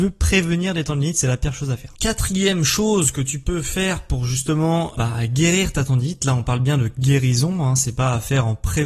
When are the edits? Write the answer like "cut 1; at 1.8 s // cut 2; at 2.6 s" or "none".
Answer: cut 1; at 5.0 s